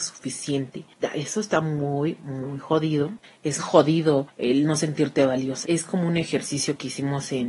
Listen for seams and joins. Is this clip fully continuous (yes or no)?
no